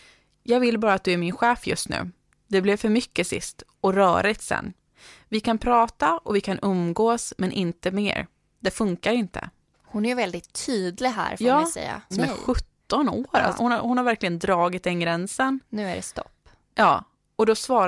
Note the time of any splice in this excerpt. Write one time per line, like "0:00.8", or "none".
0:12.1
0:13.6